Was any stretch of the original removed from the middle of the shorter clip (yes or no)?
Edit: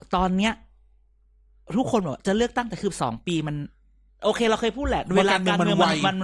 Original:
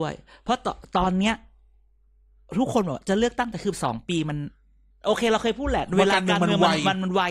no